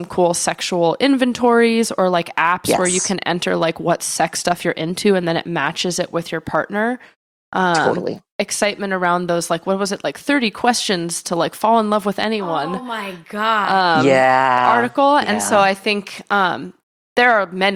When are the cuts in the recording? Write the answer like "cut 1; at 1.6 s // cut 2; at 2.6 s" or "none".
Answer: cut 1; at 8.3 s